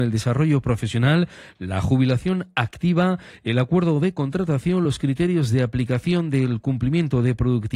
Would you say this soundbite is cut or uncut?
uncut